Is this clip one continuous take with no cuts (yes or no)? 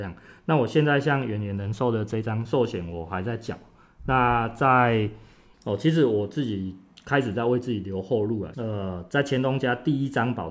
no